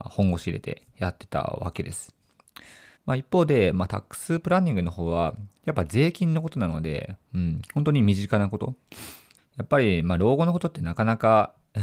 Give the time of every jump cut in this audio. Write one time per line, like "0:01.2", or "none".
0:03.0
0:09.4